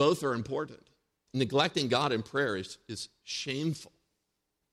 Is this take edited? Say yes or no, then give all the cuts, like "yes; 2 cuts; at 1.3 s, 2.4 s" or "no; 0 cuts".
yes; 1 cut; at 1.3 s